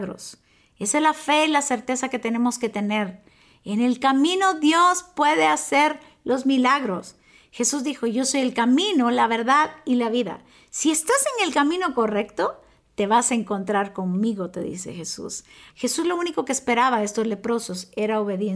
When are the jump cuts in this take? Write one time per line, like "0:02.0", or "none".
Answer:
0:15.7